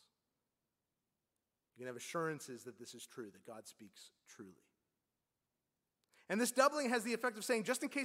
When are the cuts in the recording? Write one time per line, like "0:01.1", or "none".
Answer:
none